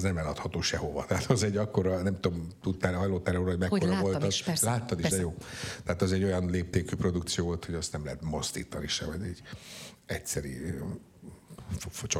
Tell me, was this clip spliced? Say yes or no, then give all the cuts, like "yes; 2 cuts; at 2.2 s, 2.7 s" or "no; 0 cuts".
no; 0 cuts